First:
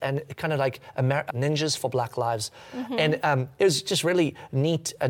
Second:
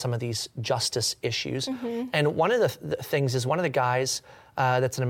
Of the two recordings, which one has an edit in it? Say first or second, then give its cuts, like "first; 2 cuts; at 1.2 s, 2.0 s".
first; 1 cut; at 1.3 s